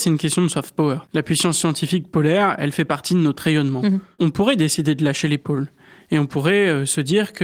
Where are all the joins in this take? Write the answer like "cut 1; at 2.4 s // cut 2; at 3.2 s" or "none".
none